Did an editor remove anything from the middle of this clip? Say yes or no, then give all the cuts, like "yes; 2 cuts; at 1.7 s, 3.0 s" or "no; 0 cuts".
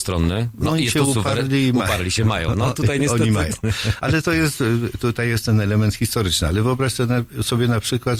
no; 0 cuts